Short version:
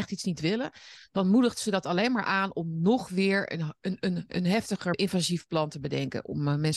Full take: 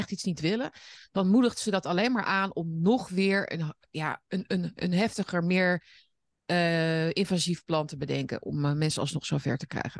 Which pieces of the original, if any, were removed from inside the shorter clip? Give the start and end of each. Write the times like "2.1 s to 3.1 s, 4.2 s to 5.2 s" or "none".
3.8 s to 4.2 s, 5.4 s to 7.1 s

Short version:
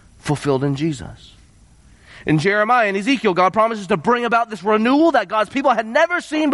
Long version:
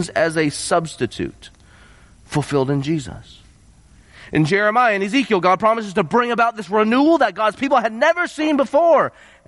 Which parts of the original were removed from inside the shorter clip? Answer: none

